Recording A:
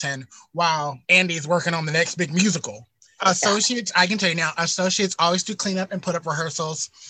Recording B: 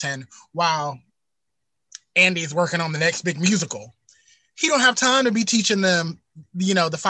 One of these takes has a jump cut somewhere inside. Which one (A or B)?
A